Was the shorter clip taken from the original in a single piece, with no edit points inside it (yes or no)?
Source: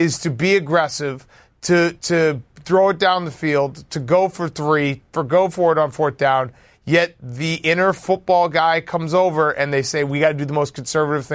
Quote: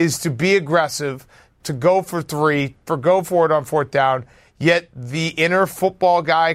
no